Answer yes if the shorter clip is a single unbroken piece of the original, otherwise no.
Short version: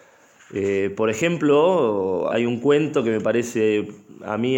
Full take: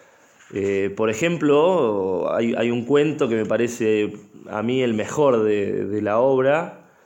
no